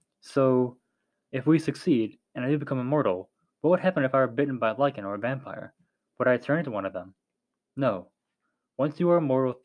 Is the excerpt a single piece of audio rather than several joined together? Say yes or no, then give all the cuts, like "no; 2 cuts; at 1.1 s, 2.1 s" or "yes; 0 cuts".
yes; 0 cuts